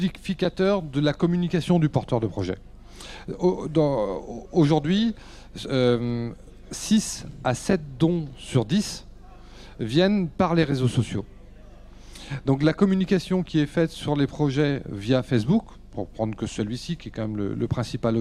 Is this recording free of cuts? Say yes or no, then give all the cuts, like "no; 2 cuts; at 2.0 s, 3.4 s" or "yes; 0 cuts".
yes; 0 cuts